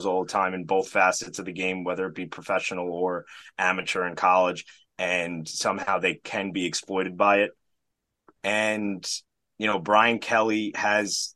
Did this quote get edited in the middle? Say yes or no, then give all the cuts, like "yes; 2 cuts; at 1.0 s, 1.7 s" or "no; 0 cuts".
no; 0 cuts